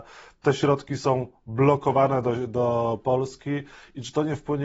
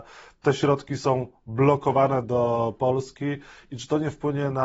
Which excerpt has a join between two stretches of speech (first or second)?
second